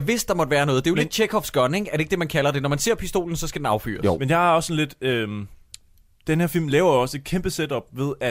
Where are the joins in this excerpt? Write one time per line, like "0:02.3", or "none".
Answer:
none